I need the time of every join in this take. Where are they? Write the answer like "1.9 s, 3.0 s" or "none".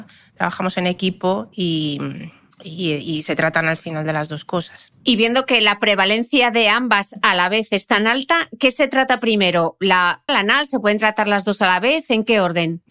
10.3 s